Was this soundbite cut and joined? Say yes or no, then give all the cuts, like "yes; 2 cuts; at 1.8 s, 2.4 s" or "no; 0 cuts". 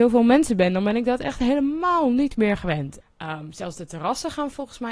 yes; 1 cut; at 3.0 s